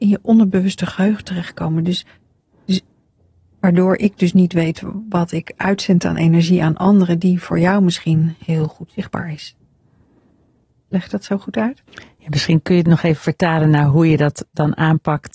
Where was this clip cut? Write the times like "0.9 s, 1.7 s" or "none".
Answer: 11.9 s